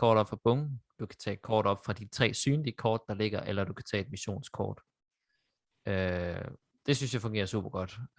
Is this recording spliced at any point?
no; 0 cuts

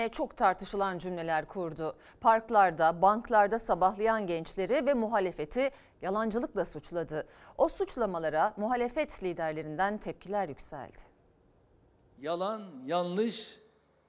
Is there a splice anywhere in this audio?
no; 0 cuts

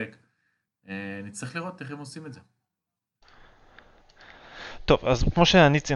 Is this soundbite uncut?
yes; 0 cuts

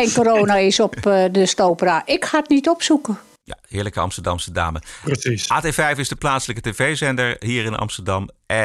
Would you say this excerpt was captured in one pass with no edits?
yes; 0 cuts

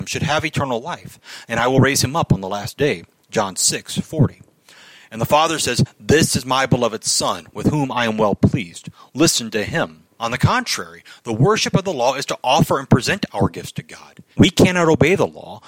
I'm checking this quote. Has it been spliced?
yes; 2 cuts; at 10.2 s, 14.3 s

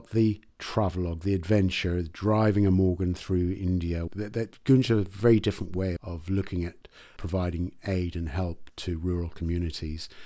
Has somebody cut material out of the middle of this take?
yes; 2 cuts; at 4.1 s, 6.0 s

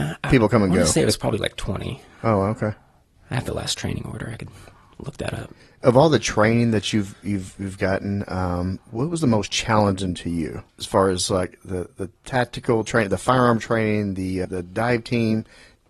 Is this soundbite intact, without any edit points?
no; 2 cuts; at 10.7 s, 14.4 s

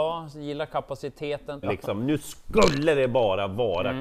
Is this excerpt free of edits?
no; 1 cut; at 1.6 s

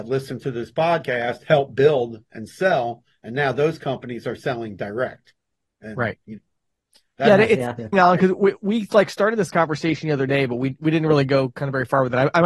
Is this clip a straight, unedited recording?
no; 1 cut; at 7.9 s

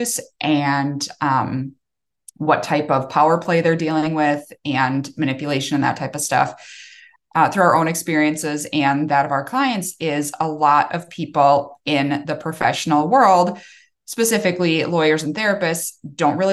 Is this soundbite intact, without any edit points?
no; 1 cut; at 7.2 s

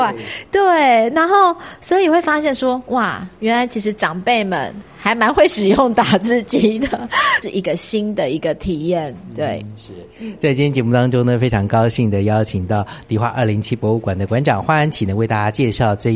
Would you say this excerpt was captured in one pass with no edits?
no; 1 cut; at 7.4 s

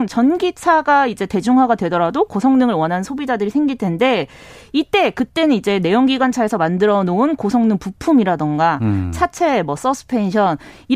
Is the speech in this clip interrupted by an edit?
no; 0 cuts

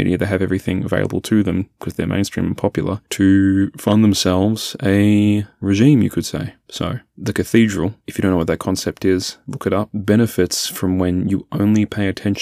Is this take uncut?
yes; 0 cuts

